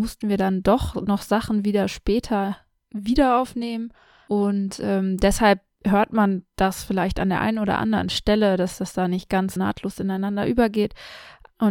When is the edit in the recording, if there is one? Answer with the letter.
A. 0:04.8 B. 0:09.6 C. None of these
B